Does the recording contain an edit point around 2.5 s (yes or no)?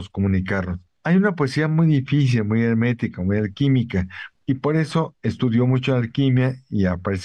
no